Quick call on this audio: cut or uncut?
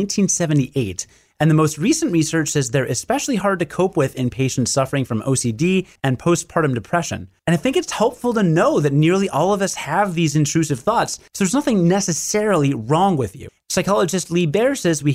cut